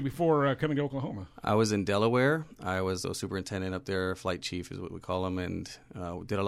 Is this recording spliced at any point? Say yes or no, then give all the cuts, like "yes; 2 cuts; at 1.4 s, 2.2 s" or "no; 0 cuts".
yes; 1 cut; at 3.0 s